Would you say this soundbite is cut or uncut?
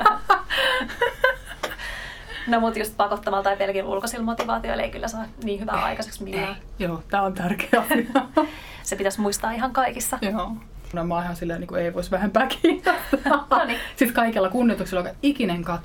cut